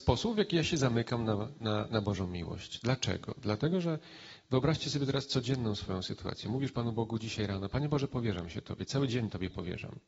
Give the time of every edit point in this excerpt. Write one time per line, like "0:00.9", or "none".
none